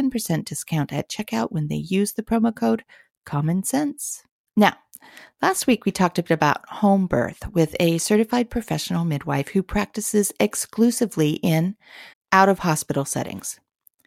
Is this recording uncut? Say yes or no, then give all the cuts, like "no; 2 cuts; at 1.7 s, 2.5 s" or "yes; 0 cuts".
no; 2 cuts; at 4.5 s, 12.1 s